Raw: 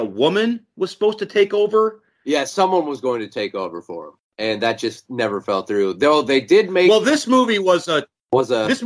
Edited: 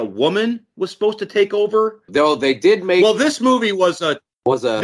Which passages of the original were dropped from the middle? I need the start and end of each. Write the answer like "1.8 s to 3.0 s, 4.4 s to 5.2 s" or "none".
2.1 s to 5.9 s

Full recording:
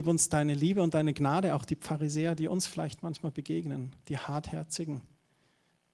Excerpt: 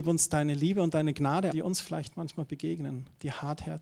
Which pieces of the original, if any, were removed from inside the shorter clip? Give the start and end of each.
1.5 s to 2.4 s

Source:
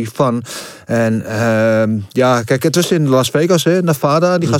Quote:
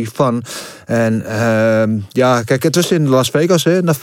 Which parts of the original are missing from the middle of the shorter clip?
none

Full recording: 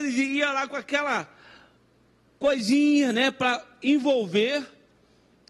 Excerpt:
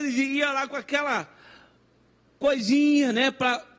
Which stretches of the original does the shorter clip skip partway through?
none

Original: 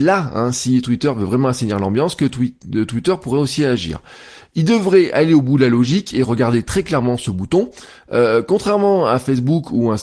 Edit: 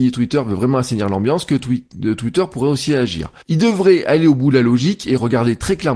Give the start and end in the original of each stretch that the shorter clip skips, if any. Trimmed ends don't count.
4.1 s to 4.5 s

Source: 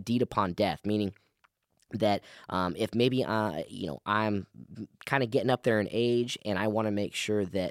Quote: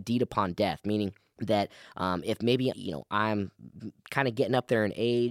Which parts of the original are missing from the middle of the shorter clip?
1.3 s to 1.9 s, 3.3 s to 3.7 s

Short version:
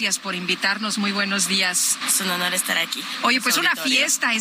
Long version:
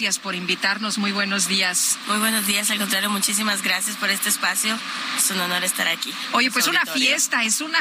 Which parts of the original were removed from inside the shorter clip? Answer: 2.0 s to 5.1 s

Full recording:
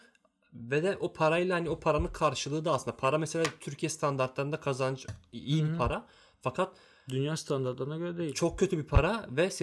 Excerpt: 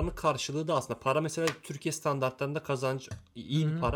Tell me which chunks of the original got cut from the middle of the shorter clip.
none

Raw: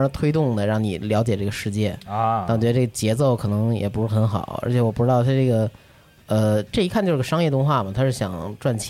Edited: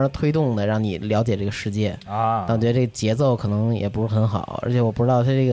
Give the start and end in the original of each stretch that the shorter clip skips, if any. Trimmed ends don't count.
none

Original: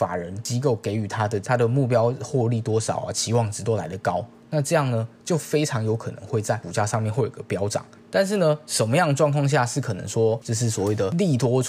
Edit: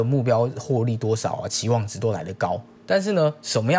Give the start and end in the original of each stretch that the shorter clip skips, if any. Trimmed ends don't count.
4.4 s to 8.0 s

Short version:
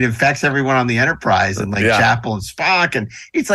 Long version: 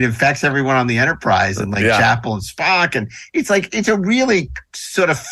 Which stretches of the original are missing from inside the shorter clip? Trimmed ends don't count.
none

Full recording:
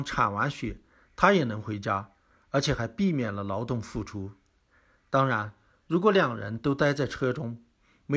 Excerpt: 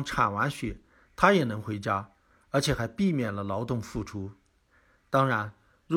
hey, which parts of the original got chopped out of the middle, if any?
none

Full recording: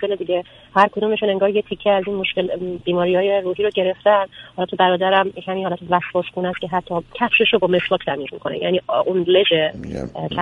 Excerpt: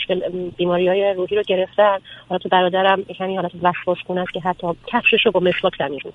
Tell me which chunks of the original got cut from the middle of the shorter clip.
none

